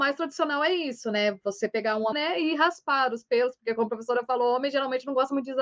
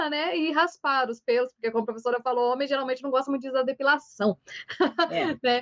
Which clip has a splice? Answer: first; 1 cut; at 2.1 s

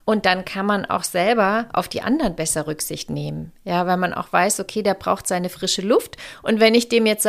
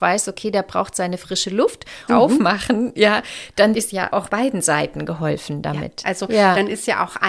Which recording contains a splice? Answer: second; 2 cuts; at 2.1 s, 6.0 s

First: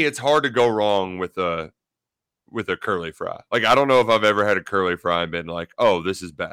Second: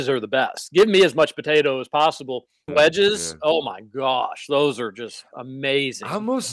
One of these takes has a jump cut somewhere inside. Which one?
second; 1 cut; at 2.7 s

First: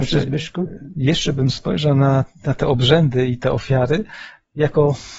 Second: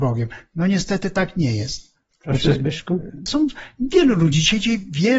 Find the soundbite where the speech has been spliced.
second; 2 cuts; at 2.1 s, 3.3 s

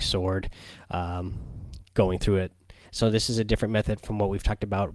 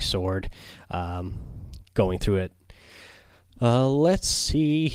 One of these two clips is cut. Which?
first; 1 cut; at 2.8 s

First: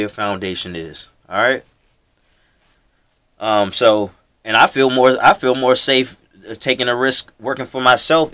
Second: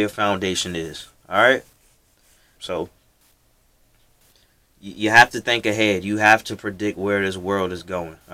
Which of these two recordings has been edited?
second; 1 cut; at 2.6 s

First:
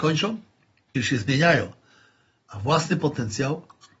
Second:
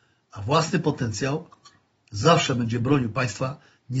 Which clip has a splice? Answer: first; 1 cut; at 0.9 s

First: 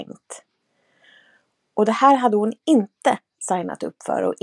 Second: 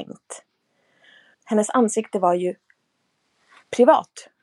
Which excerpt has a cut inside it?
second; 1 cut; at 1.3 s

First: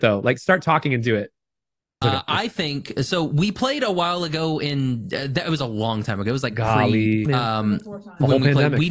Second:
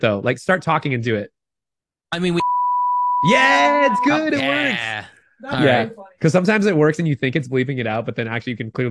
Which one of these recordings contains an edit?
first; 2 cuts; at 2.0 s, 7.3 s

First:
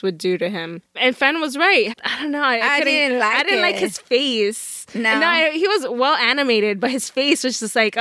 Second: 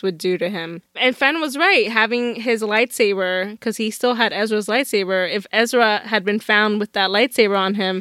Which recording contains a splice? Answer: first; 1 cut; at 1.9 s

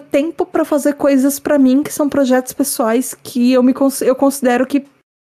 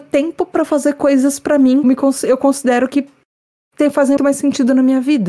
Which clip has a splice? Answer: second; 2 cuts; at 1.8 s, 4.2 s

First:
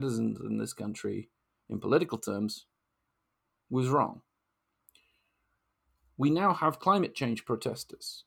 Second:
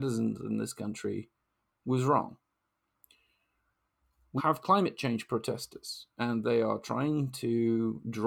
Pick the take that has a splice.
second; 2 cuts; at 1.7 s, 4.4 s

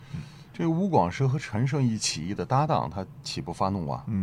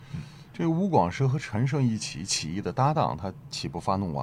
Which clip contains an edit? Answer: first; 1 cut; at 2.0 s

